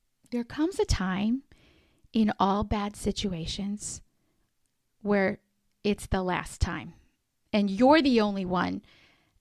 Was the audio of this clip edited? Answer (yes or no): no